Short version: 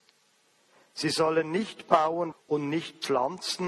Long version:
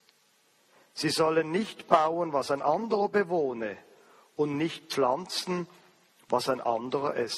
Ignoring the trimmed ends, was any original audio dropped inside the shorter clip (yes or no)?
yes